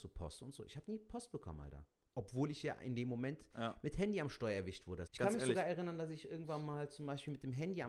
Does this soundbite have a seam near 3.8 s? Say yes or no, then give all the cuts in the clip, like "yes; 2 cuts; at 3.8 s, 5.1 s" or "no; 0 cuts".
no; 1 cut; at 5.1 s